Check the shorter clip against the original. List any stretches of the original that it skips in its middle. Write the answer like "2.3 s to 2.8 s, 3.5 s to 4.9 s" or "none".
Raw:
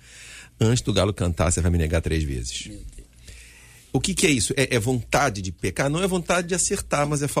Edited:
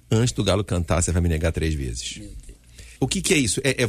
3.5 s to 3.9 s